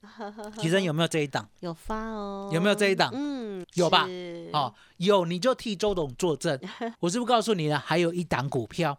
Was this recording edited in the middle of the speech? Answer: yes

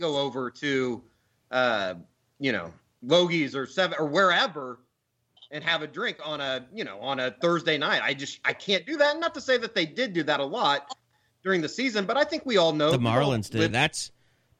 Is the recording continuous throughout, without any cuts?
no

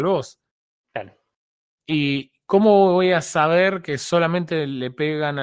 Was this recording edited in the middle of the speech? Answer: no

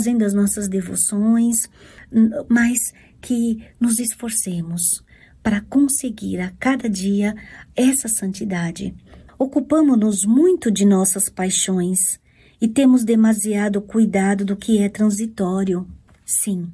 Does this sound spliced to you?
yes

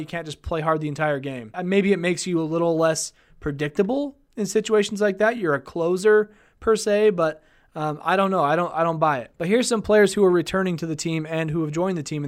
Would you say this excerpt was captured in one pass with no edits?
yes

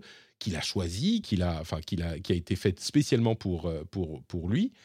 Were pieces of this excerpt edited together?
yes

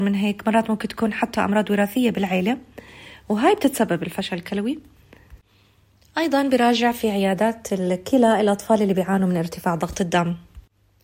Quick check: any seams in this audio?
no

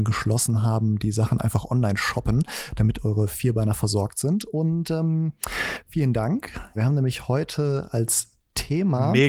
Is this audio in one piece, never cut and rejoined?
no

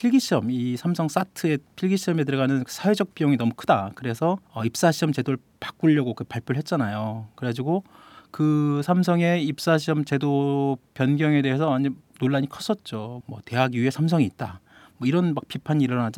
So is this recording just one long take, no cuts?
no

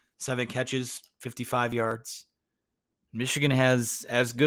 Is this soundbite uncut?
no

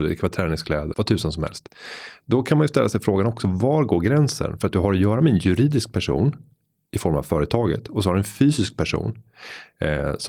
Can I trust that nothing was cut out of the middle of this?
no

